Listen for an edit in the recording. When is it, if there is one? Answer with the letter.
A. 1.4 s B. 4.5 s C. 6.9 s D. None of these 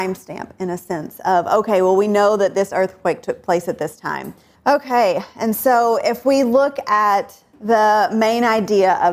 B